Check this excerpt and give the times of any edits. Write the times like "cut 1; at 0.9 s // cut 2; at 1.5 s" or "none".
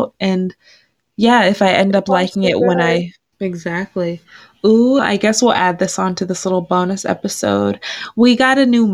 cut 1; at 3.3 s // cut 2; at 5.0 s